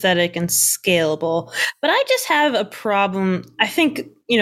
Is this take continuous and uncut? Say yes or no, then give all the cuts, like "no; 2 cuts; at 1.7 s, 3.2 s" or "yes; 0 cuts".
yes; 0 cuts